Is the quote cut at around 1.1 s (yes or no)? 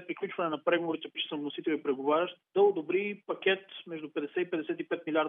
yes